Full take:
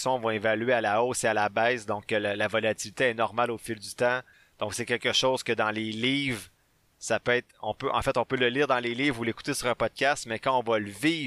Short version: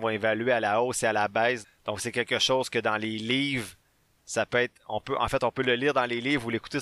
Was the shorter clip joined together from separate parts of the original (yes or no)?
yes